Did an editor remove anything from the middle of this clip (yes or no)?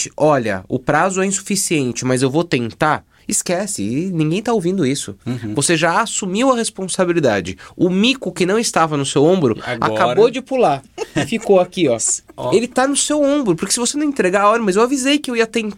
no